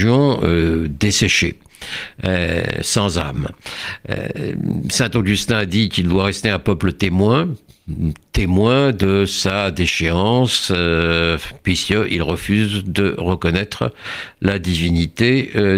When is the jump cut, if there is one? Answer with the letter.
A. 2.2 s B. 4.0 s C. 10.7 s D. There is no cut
D